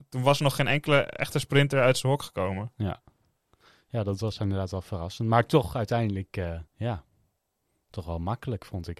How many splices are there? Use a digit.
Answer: 1